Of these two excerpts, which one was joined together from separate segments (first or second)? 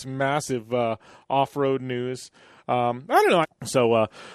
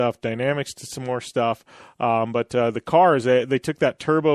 first